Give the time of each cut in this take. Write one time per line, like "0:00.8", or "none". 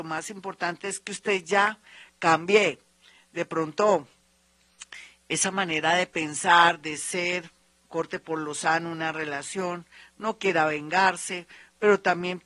none